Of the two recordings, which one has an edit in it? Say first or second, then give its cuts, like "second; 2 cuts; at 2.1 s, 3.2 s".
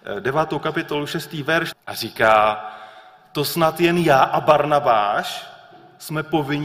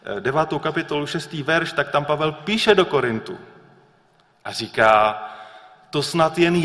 first; 1 cut; at 1.7 s